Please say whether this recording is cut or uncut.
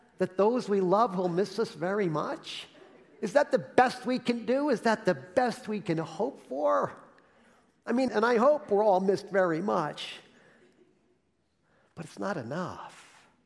cut